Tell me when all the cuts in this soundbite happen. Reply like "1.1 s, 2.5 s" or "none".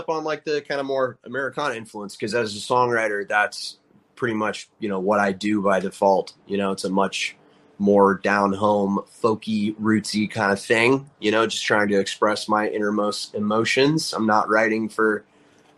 none